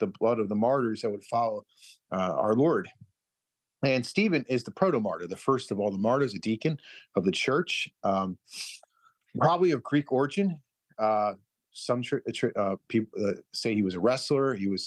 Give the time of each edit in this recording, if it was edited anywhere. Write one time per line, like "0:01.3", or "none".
none